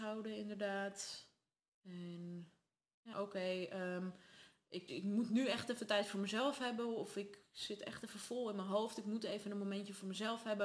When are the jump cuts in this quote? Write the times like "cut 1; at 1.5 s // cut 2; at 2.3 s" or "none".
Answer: cut 1; at 3.1 s // cut 2; at 4.9 s